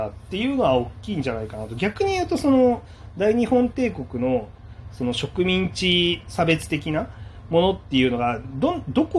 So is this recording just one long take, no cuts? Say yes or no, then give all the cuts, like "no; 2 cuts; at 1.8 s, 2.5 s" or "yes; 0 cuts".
yes; 0 cuts